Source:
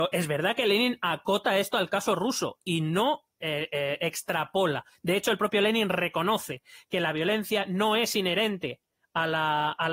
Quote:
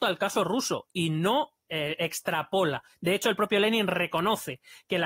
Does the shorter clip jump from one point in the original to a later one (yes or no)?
yes